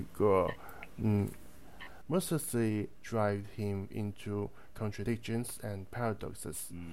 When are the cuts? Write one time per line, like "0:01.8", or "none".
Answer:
0:02.0